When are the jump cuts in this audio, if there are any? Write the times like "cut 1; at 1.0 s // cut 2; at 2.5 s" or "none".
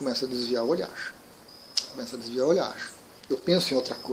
cut 1; at 3.2 s